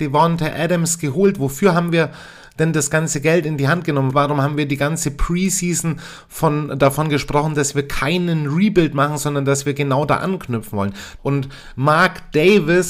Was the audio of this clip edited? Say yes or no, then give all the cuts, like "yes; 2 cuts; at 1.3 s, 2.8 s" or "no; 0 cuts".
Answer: yes; 2 cuts; at 4.1 s, 11.2 s